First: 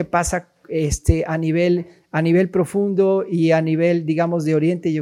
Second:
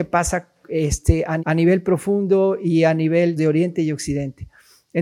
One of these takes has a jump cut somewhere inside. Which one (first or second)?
second